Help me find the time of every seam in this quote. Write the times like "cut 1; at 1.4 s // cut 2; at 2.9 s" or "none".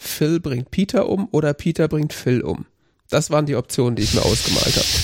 none